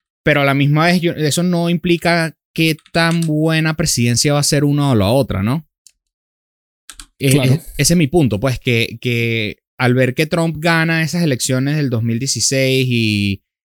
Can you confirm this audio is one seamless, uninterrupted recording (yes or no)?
yes